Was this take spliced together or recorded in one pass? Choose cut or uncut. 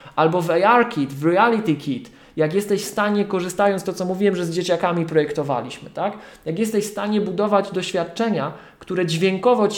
uncut